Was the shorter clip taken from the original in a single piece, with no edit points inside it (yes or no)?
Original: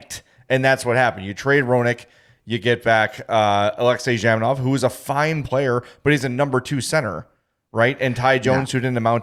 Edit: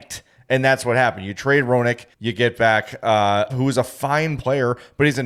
no